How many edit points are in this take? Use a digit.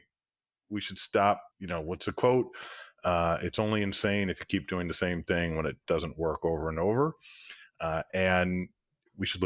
1